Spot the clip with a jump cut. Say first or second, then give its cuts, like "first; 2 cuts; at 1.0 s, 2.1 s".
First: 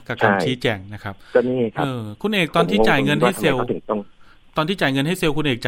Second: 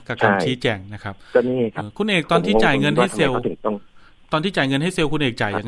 second; 1 cut; at 1.8 s